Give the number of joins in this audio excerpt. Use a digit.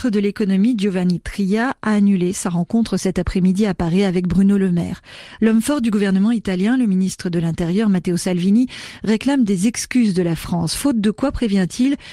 1